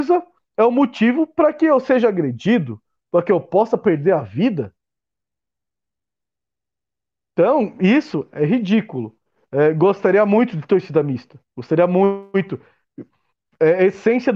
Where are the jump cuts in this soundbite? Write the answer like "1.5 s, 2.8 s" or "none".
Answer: none

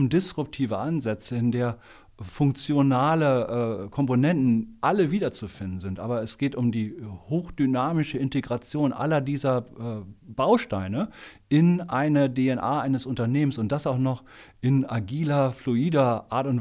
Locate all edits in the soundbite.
none

